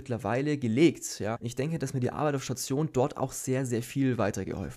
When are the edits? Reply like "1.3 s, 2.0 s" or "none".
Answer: 1.4 s

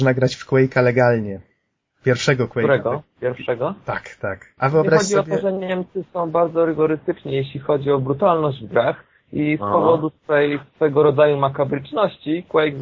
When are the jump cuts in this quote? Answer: 4.6 s

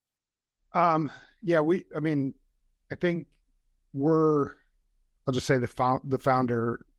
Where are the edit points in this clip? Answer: none

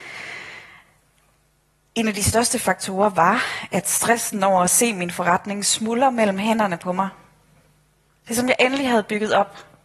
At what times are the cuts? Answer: none

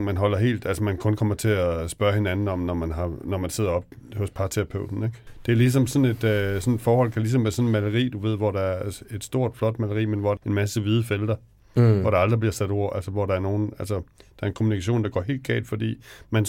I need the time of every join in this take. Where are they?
10.4 s

